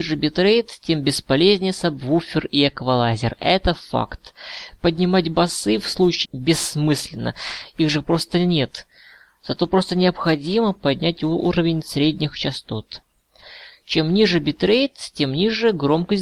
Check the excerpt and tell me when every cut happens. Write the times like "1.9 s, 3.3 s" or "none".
6.2 s